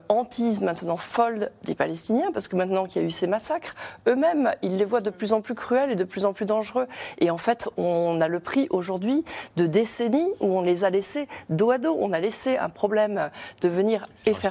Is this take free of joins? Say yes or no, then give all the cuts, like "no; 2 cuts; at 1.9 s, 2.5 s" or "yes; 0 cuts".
yes; 0 cuts